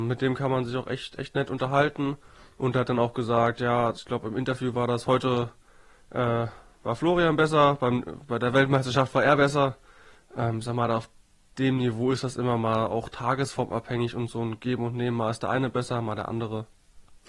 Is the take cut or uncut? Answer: uncut